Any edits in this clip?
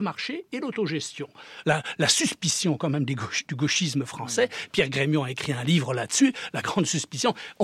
yes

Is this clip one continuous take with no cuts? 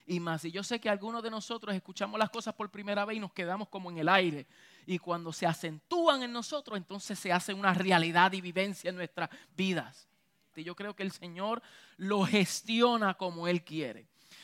no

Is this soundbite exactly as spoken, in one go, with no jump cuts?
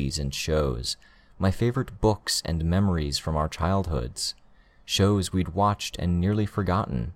yes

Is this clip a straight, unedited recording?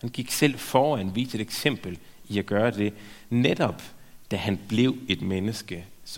yes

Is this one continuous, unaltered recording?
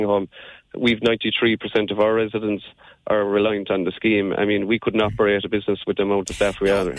yes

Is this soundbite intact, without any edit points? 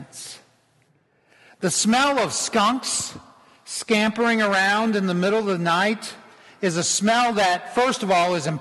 yes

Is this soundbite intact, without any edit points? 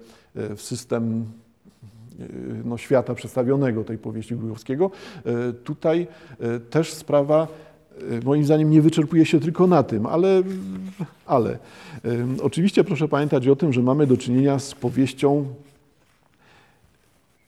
yes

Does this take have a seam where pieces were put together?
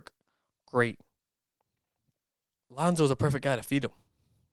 yes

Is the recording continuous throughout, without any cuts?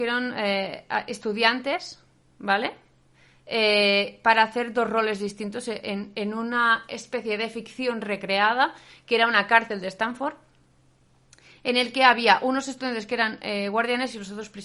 yes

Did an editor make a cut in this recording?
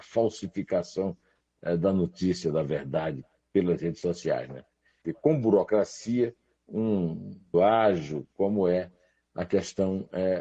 yes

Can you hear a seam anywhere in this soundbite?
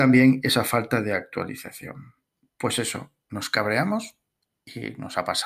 no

